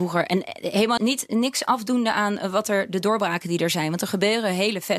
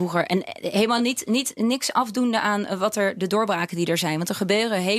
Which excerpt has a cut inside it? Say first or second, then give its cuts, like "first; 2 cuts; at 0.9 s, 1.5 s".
first; 1 cut; at 1.0 s